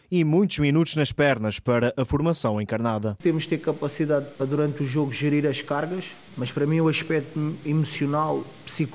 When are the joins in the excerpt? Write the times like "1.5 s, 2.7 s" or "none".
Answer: none